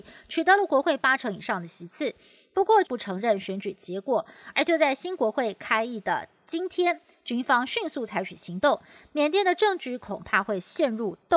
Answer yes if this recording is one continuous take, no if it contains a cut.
no